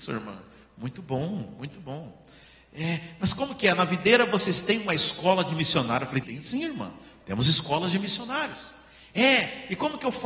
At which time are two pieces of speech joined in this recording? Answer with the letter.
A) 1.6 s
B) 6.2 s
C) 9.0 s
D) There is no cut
B